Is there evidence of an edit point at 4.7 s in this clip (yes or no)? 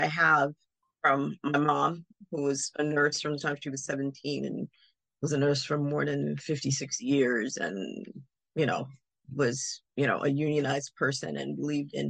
no